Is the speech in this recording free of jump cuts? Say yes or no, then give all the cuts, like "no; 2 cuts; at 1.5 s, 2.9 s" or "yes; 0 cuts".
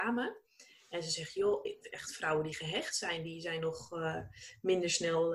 yes; 0 cuts